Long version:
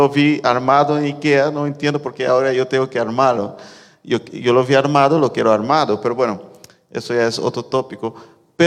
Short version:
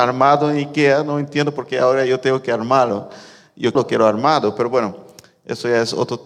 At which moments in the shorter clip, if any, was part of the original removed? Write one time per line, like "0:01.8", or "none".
0:03.7